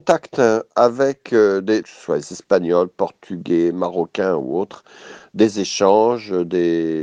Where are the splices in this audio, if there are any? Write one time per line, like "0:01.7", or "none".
0:01.8